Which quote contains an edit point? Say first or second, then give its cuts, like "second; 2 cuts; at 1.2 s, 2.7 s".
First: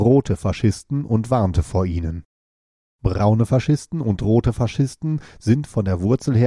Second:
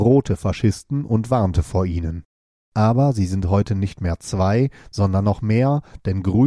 second; 1 cut; at 2.6 s